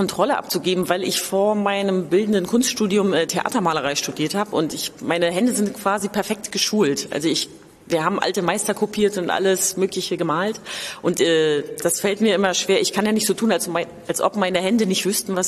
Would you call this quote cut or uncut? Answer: uncut